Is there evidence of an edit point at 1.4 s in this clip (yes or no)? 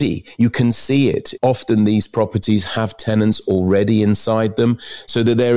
yes